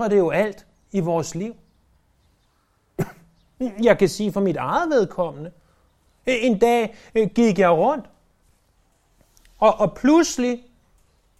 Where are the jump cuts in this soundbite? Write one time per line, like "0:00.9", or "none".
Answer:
none